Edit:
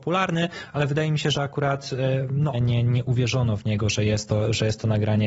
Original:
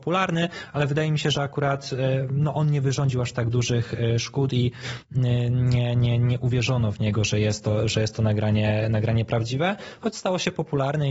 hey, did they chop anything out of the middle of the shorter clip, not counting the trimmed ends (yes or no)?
yes